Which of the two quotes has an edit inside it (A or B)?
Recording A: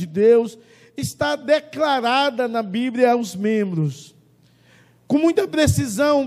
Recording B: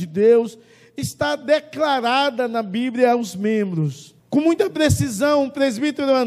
B